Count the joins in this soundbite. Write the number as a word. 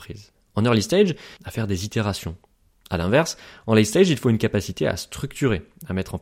one